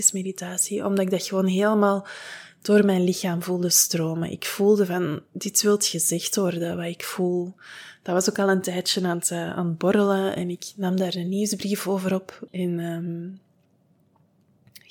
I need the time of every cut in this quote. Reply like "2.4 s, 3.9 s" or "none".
12.5 s